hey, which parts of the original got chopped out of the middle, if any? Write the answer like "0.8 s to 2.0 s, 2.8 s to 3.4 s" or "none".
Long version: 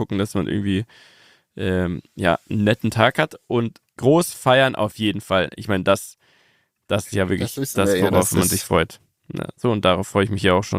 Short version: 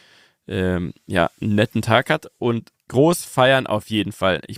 none